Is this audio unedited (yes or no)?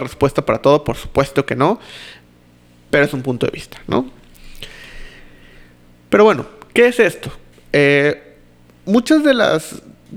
no